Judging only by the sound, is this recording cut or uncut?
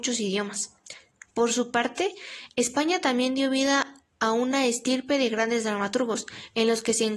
uncut